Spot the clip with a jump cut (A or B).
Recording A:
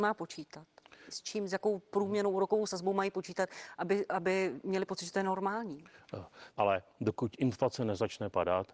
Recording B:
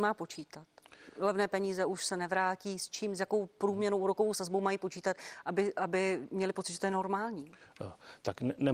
A